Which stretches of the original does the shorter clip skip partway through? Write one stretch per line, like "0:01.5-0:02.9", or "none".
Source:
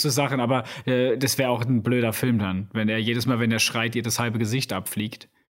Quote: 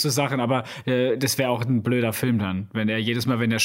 none